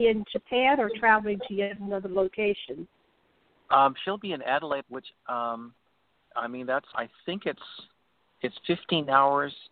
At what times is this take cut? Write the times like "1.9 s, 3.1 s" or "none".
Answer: 4.8 s, 6.9 s